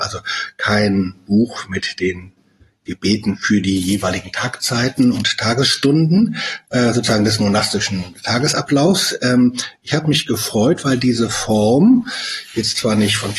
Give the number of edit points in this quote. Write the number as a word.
zero